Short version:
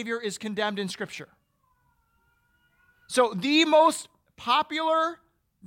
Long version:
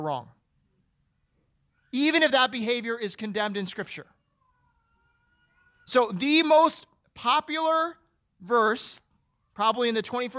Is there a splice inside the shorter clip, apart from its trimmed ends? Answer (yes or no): no